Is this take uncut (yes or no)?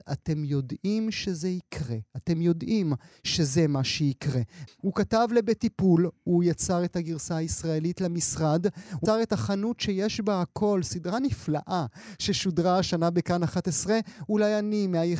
no